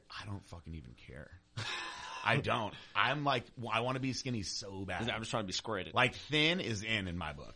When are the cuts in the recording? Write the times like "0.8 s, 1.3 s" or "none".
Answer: none